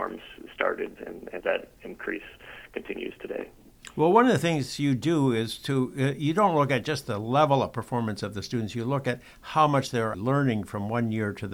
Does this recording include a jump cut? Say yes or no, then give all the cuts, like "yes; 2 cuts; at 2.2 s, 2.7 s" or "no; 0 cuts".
yes; 2 cuts; at 1.4 s, 10.1 s